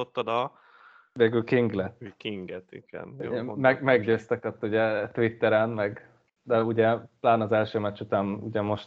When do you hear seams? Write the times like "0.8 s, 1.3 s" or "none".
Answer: none